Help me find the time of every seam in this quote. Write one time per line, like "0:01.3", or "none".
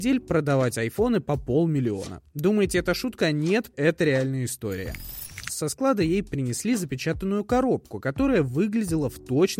0:03.7
0:05.5